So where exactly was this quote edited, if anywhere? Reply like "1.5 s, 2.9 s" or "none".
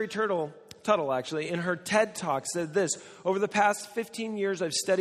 none